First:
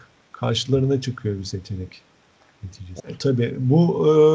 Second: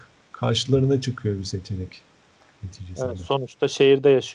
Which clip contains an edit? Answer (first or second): first